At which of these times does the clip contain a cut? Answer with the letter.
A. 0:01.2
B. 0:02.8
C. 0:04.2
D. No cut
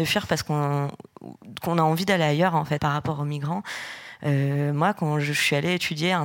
B